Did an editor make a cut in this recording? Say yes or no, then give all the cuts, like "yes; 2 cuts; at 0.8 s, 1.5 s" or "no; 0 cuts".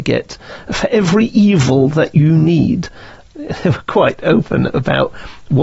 no; 0 cuts